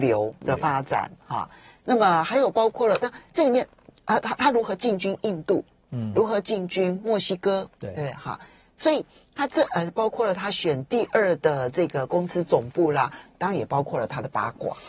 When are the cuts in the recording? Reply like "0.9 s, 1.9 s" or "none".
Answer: none